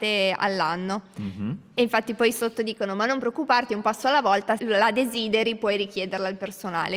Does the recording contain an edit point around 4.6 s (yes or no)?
yes